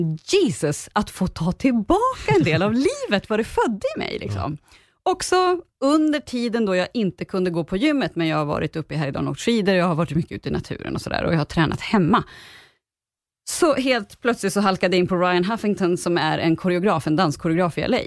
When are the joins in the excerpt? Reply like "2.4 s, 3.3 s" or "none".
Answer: none